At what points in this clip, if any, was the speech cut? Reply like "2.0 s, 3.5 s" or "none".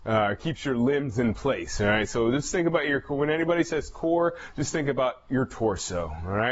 none